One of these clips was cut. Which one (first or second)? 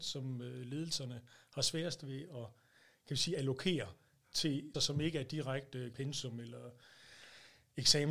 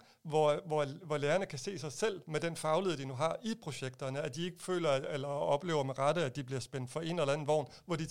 first